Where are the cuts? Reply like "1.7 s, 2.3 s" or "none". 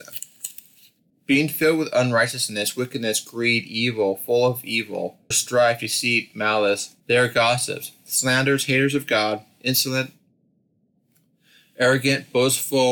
1.1 s, 5.3 s, 7.0 s